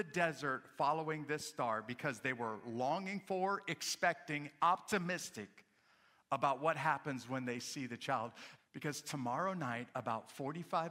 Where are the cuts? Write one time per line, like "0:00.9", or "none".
0:08.6